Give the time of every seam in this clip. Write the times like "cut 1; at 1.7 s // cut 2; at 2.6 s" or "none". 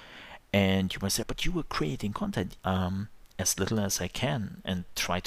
cut 1; at 1.2 s // cut 2; at 2.6 s